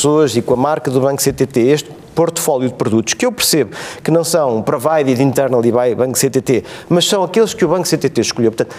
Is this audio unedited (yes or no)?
yes